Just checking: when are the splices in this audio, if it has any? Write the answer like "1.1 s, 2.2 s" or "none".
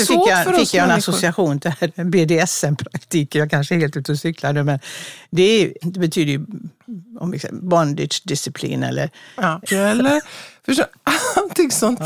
5.8 s, 9.7 s

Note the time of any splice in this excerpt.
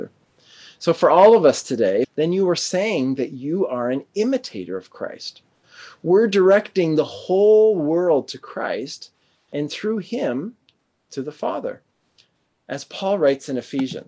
2.0 s

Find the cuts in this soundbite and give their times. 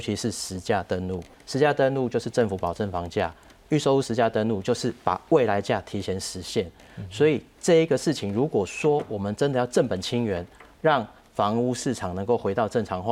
1.3 s

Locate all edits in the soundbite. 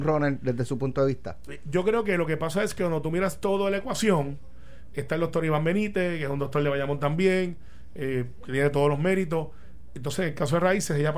none

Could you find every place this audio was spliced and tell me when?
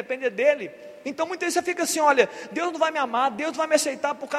1.0 s

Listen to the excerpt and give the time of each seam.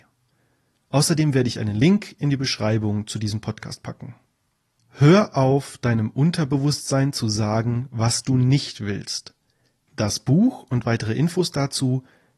4.8 s, 9.9 s

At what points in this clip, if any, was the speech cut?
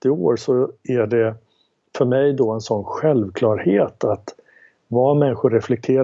none

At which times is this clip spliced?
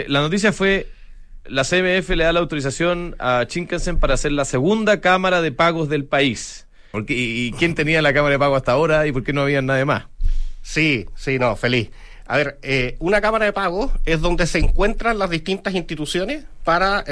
6.9 s

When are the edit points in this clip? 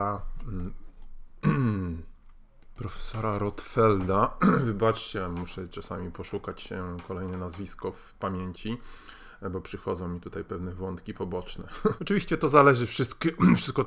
12.0 s

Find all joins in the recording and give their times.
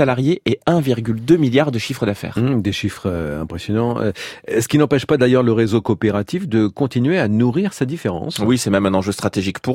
none

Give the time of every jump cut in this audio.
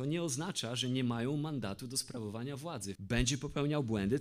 3.0 s

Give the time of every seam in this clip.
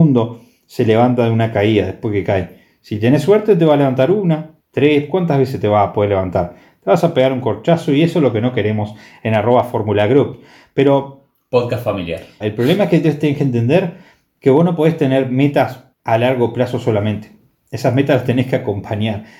4.6 s, 12.4 s, 15.9 s

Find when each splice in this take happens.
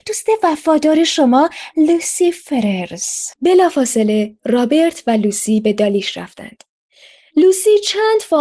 3.3 s

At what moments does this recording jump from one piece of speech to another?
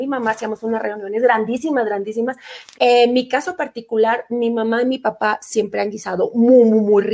2.7 s

